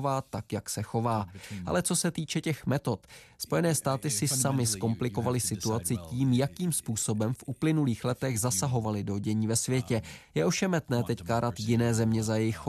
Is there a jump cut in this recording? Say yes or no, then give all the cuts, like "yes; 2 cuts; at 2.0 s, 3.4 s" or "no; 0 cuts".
no; 0 cuts